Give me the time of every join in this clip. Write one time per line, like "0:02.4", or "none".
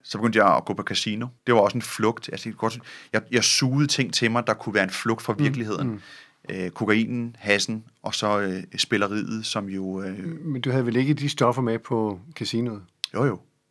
0:01.4